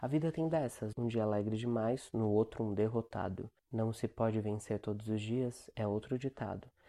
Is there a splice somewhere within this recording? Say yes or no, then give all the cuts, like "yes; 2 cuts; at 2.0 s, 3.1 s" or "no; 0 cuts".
yes; 2 cuts; at 0.9 s, 3.6 s